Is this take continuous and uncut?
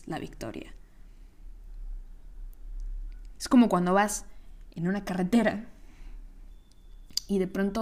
no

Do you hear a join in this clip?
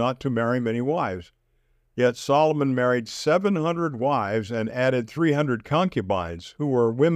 no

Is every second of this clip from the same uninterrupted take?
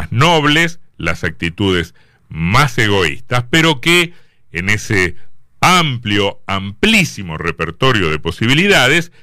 yes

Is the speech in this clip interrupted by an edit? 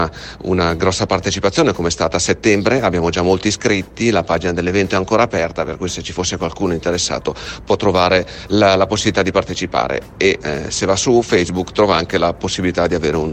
no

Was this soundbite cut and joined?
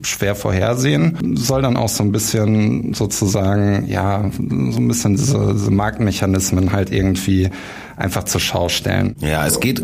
no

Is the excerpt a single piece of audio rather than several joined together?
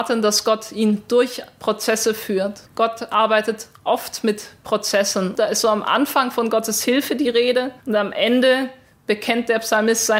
no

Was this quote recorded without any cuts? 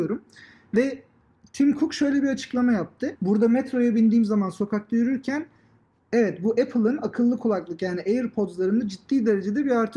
no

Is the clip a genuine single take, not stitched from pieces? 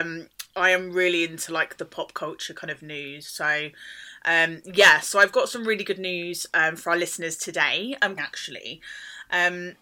no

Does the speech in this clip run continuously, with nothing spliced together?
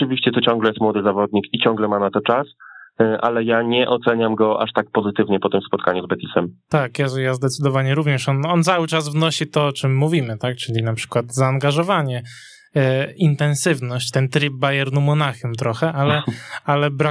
yes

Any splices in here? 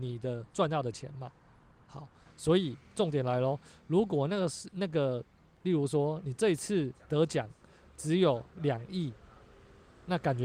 yes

